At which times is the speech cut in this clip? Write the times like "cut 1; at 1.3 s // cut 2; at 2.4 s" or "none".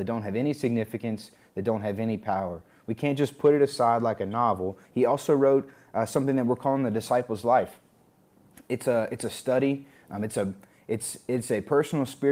cut 1; at 4.8 s // cut 2; at 10.0 s